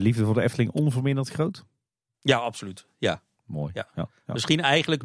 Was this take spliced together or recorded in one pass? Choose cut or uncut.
uncut